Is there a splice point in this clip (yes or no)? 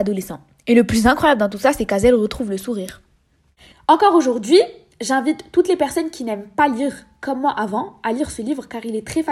yes